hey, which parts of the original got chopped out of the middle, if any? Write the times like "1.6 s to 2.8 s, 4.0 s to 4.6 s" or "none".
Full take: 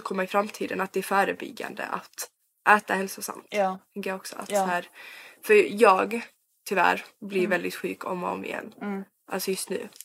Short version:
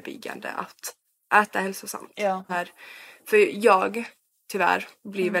3.8 s to 4.7 s